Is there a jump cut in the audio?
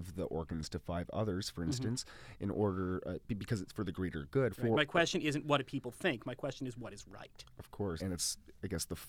yes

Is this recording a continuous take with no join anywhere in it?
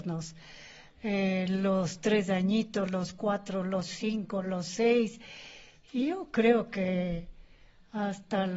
yes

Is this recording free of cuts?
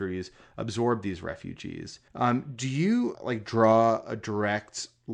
no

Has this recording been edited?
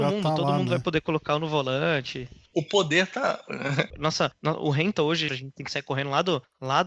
yes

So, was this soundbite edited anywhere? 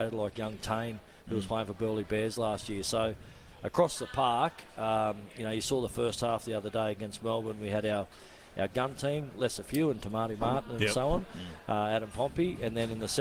no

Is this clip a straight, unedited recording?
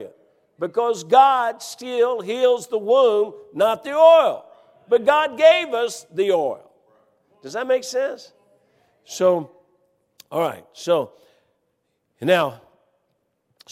yes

